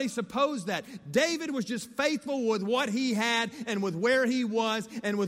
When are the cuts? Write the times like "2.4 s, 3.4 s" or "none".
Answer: none